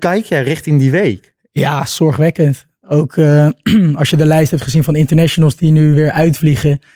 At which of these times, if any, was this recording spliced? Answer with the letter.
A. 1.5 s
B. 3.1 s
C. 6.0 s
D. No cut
D